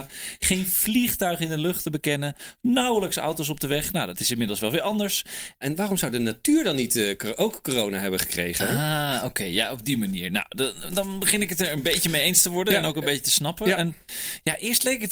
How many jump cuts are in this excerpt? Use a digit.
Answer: 1